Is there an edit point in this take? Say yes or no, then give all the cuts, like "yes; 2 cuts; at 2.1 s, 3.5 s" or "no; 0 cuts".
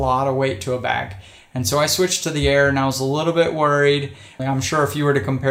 yes; 1 cut; at 4.4 s